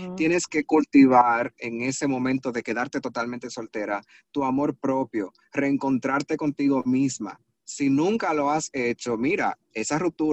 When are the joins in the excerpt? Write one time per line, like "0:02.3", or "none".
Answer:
none